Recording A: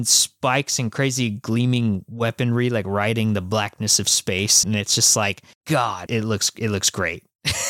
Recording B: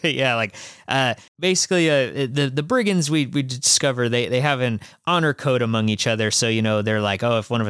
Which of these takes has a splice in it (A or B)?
A